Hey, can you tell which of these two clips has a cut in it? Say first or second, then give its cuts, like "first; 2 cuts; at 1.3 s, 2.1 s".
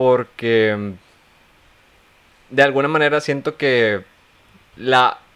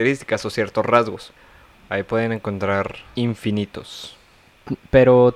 second; 2 cuts; at 1.7 s, 3.2 s